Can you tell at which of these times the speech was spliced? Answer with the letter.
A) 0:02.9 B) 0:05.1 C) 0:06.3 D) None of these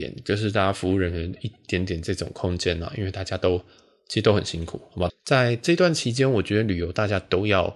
B